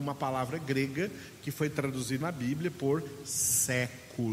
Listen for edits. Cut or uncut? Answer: cut